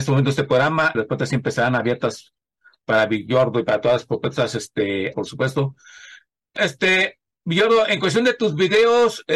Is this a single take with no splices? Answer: no; 3 cuts; at 0.9 s, 5.1 s, 6.6 s

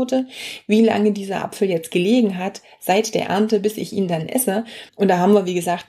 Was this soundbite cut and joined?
yes; 1 cut; at 4.9 s

